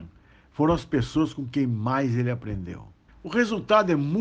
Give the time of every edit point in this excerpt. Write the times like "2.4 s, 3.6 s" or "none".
3.1 s